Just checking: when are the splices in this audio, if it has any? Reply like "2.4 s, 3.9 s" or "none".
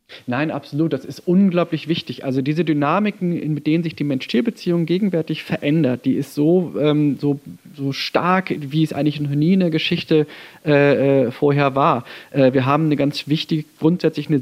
none

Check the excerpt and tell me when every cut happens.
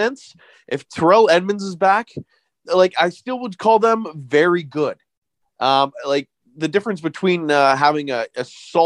none

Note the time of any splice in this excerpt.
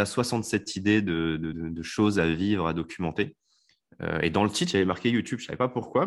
none

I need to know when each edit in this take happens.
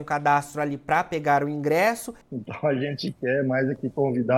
2.2 s

